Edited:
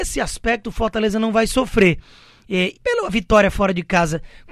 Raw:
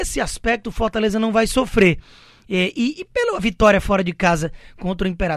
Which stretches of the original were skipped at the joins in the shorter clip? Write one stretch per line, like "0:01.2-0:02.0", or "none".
0:02.7-0:03.0